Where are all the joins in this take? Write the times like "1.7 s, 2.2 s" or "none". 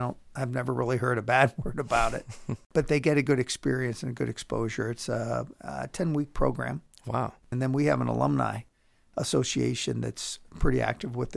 7.5 s